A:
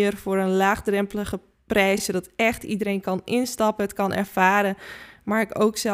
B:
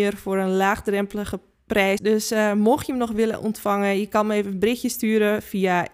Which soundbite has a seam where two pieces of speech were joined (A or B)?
B